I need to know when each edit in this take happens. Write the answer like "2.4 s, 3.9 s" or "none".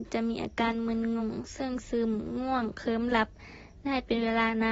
1.2 s